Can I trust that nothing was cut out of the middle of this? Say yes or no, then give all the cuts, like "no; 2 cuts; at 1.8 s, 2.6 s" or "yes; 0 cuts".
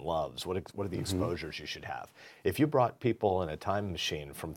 no; 1 cut; at 2.4 s